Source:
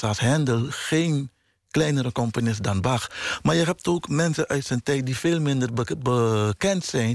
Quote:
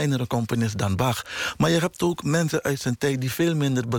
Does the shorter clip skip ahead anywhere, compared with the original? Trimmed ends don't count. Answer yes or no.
no